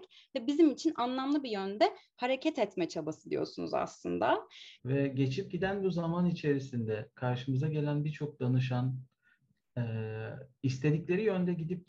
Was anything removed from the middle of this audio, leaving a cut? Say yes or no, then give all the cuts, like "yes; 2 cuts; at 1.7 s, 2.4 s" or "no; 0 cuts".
yes; 1 cut; at 4.8 s